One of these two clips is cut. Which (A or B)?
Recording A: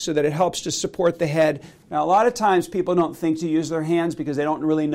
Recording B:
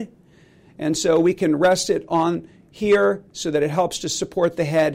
A